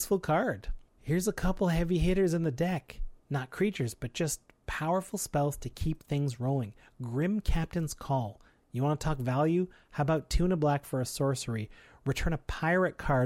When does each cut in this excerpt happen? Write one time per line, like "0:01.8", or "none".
none